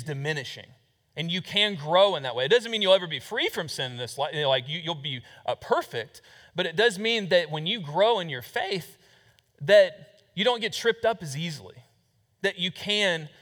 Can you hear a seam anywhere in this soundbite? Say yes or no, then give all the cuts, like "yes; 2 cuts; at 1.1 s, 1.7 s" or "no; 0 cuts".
no; 0 cuts